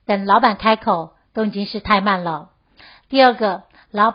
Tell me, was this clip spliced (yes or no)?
no